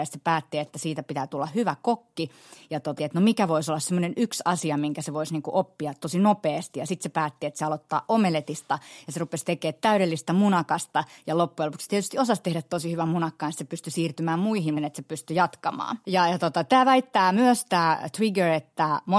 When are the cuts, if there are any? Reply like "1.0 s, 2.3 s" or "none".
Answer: 3.0 s, 14.8 s, 16.0 s